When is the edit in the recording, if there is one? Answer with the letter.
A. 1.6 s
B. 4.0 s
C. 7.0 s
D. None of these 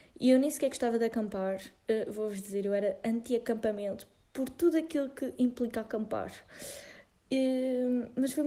D